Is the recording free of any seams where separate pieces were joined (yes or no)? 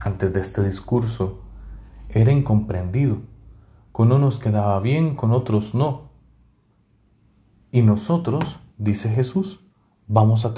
yes